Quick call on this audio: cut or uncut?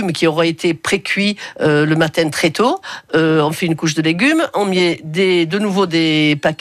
uncut